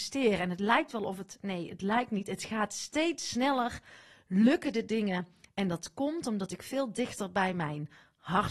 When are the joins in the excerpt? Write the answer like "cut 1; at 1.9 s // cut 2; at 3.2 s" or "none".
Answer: none